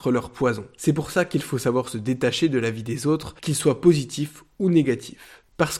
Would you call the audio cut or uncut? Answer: uncut